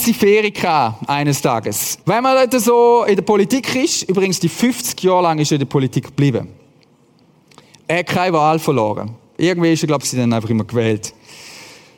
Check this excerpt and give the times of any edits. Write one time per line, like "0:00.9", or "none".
0:02.0
0:10.0